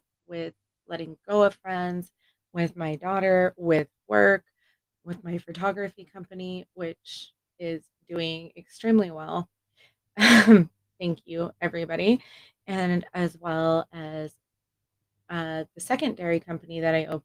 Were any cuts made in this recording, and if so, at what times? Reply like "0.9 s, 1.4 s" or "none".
none